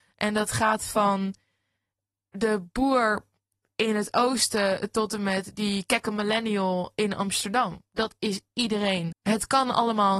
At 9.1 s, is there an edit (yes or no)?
yes